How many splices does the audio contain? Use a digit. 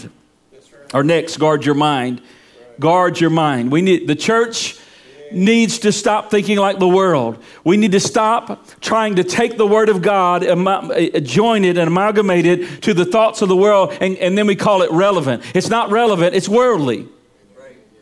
0